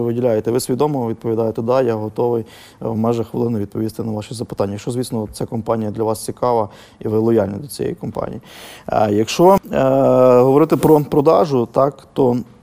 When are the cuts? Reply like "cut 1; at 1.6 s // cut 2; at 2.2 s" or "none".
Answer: none